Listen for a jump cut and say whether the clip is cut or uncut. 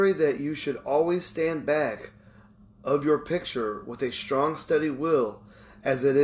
uncut